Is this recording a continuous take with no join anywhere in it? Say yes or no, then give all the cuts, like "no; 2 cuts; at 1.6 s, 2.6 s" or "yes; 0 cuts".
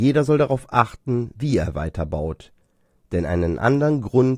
yes; 0 cuts